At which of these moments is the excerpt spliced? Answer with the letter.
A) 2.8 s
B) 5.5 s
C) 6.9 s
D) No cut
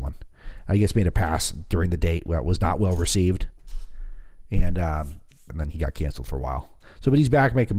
B